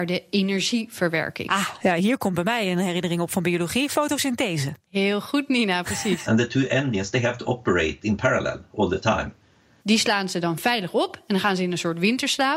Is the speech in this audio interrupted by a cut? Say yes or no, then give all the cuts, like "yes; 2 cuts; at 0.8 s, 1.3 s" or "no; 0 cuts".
yes; 2 cuts; at 6.2 s, 9.8 s